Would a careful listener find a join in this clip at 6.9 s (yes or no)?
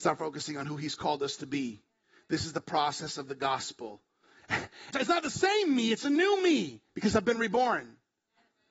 yes